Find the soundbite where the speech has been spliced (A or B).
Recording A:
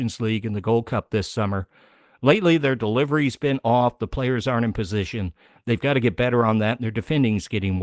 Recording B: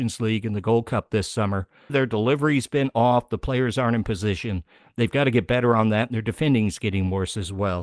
B